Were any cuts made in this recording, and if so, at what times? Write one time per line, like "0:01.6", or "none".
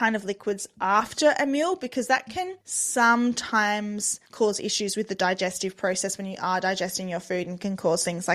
0:02.6
0:04.3